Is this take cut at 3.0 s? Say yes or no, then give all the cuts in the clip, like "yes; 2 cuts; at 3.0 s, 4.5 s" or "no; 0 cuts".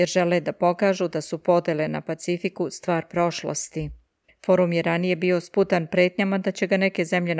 no; 1 cut; at 4.3 s